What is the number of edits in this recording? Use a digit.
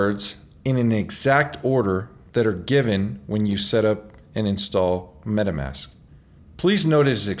1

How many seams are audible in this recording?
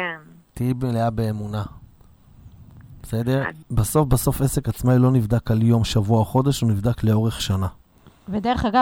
1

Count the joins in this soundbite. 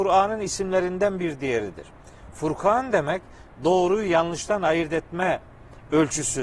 0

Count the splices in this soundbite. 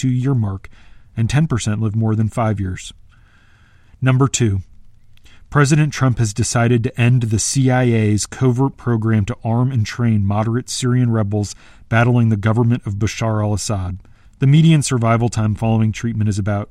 1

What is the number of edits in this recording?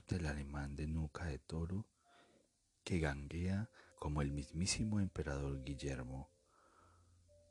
2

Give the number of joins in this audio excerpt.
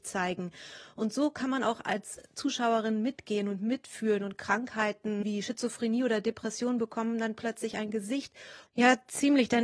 1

